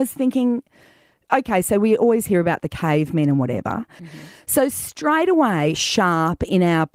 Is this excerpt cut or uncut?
cut